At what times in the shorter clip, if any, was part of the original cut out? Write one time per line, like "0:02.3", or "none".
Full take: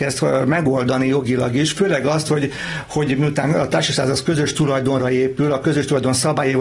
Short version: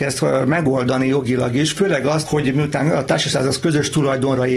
0:02.2